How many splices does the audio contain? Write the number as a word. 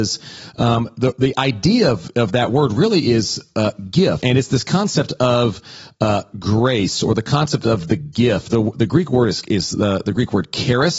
two